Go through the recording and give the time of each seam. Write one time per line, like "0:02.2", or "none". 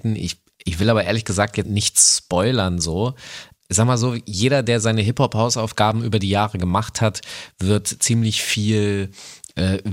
0:01.6